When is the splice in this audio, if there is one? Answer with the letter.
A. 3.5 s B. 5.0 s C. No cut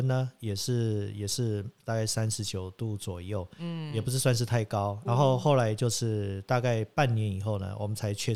B